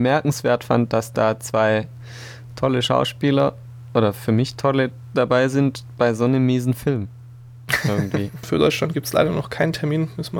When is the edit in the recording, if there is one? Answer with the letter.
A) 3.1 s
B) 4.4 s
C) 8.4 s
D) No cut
C